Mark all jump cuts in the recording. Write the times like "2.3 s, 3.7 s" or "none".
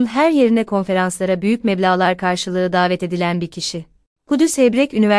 none